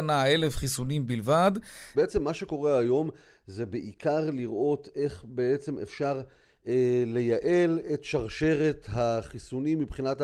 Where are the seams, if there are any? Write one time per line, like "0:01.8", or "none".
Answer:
0:01.9